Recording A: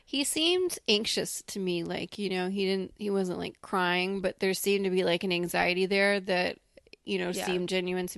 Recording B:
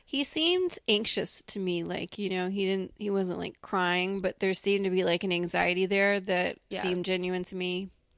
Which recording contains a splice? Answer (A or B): B